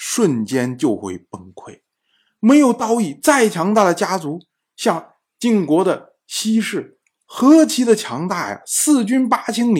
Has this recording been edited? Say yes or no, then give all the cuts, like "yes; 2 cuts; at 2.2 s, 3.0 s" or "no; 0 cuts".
no; 0 cuts